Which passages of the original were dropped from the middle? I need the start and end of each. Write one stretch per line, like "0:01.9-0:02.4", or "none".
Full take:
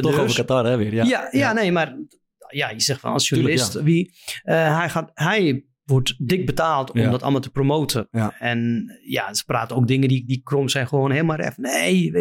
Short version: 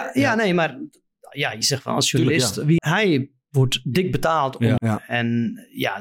0:04.0-0:05.1
0:07.1-0:08.1